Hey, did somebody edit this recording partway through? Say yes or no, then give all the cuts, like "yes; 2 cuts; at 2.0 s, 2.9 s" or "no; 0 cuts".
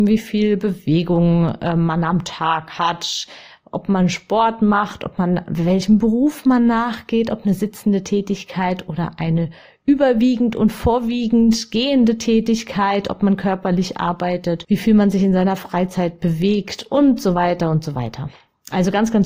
no; 0 cuts